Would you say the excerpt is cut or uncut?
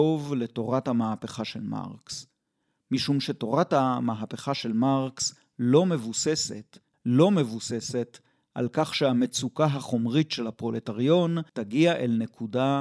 cut